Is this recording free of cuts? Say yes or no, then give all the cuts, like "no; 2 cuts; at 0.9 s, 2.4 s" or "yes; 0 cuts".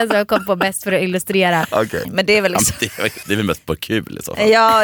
no; 2 cuts; at 2.0 s, 3.2 s